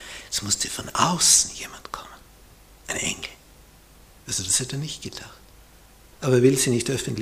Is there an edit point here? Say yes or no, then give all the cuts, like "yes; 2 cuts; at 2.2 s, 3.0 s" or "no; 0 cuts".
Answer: yes; 1 cut; at 4.1 s